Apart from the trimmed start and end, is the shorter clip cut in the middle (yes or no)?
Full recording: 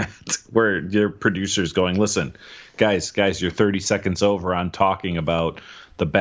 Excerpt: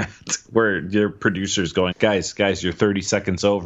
yes